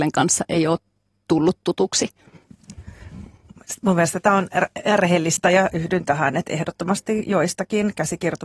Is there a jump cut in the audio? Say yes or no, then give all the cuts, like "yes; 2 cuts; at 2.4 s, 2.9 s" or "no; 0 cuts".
no; 0 cuts